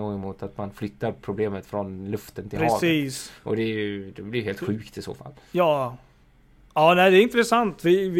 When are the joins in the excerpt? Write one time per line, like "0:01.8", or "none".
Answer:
none